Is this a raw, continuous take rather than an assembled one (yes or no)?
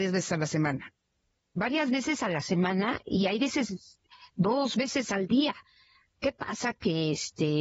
yes